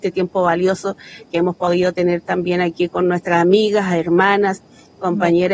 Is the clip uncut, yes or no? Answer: yes